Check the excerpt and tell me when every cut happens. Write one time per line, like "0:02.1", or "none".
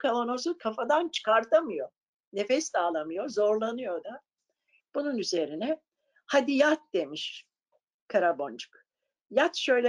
0:04.8

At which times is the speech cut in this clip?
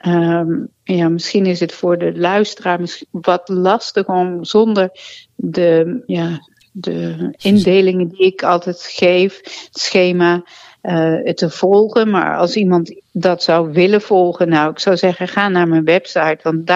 0:06.1

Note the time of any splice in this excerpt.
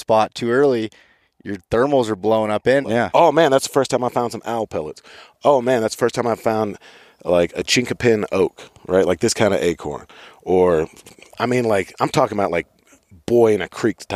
0:02.8

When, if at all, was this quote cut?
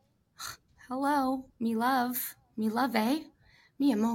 0:01.5

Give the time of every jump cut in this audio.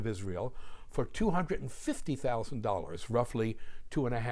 none

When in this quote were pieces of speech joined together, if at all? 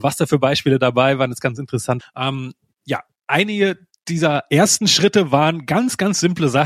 0:02.0

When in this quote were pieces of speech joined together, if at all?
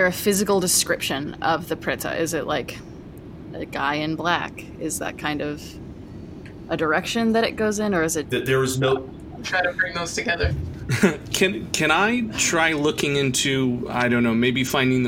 0:08.2
0:09.4

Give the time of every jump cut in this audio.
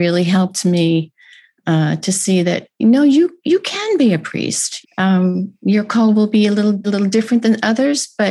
0:04.8
0:06.8

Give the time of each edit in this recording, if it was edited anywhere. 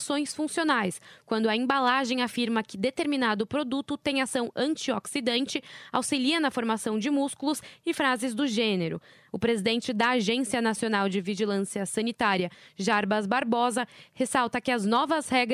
0:09.3

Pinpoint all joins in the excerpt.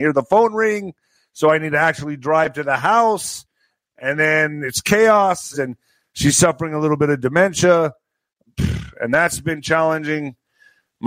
0:05.5

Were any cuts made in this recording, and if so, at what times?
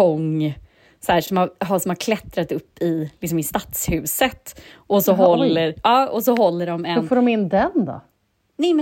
none

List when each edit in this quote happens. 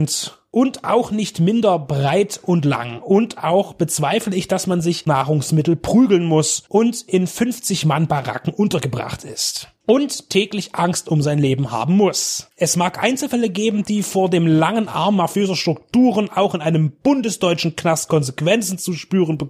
0:05.1

